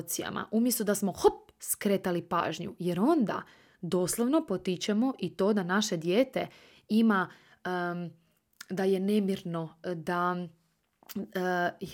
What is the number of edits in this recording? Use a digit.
0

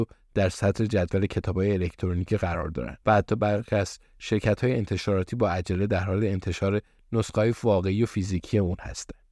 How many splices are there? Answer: 1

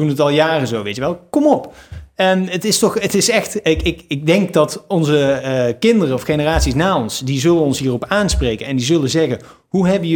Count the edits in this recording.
0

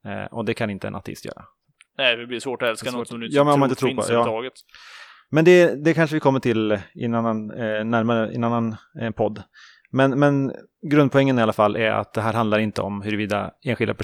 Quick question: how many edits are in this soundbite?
0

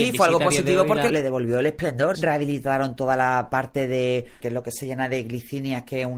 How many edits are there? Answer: 3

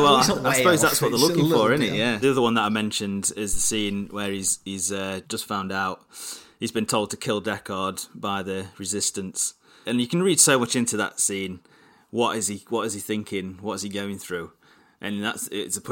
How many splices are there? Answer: 3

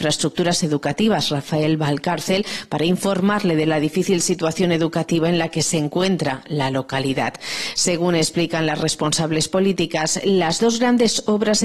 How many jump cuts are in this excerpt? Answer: 0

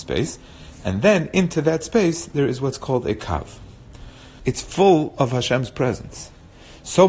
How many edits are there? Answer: 1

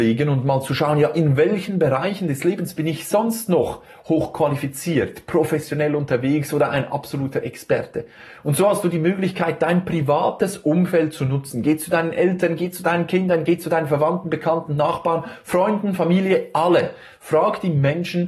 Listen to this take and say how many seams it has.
0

